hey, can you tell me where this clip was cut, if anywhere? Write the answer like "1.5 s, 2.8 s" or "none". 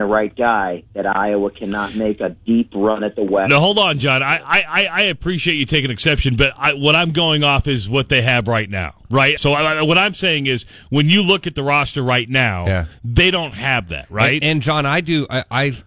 9.4 s

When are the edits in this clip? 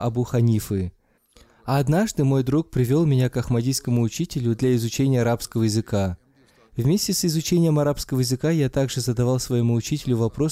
none

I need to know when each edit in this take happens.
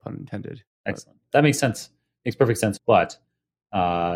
1.2 s, 2.8 s

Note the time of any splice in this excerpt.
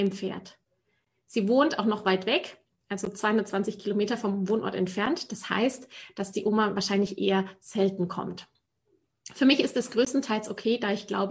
none

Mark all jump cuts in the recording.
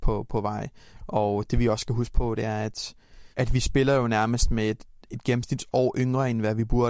3.3 s

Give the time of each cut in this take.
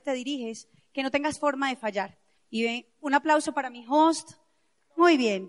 2.4 s

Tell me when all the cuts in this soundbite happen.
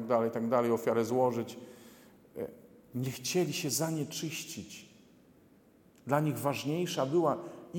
none

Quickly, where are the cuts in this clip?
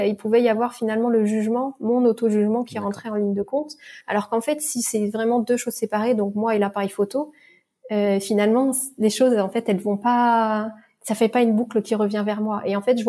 none

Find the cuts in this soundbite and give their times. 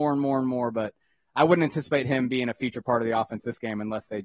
none

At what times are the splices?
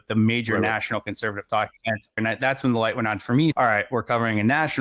2.2 s, 3.5 s

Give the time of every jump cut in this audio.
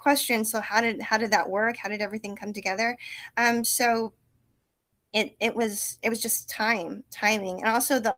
none

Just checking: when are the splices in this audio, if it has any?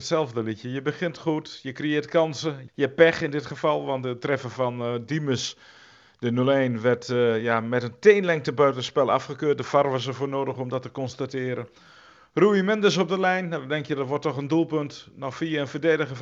2.7 s

